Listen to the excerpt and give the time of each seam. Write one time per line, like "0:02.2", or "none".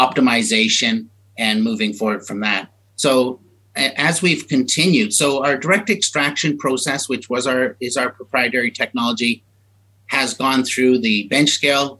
none